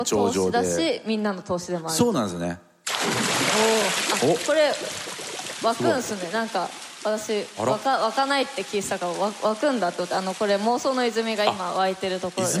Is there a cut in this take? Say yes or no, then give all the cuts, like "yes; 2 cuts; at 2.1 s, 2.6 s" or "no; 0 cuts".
no; 0 cuts